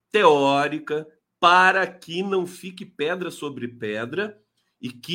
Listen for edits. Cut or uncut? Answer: cut